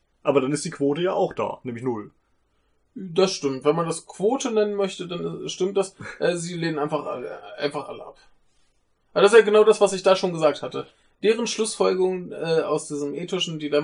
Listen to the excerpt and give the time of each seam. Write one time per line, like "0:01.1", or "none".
none